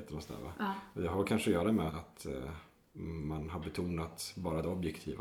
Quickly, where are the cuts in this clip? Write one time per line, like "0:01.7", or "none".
0:01.9